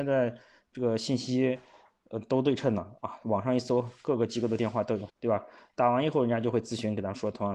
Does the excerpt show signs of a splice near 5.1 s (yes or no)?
yes